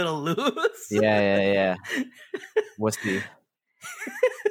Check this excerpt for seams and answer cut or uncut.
uncut